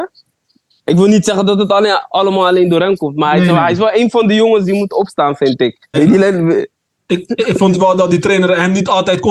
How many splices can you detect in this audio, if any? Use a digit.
1